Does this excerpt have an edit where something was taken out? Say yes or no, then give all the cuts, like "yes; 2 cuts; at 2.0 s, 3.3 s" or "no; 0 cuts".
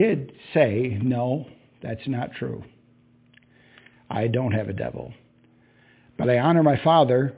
no; 0 cuts